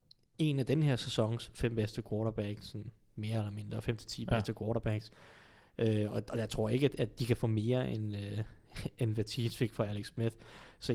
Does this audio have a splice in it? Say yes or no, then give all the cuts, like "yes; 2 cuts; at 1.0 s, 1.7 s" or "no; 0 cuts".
no; 0 cuts